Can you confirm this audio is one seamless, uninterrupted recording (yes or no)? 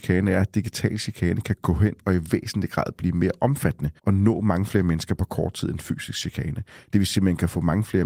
no